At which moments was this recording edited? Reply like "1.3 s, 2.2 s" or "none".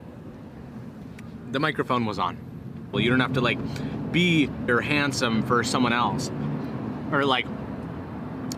2.9 s, 4.7 s